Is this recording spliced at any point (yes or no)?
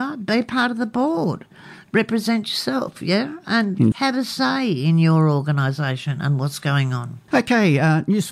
yes